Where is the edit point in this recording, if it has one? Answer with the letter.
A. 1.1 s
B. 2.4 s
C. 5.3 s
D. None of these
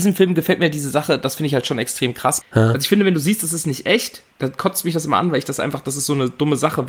B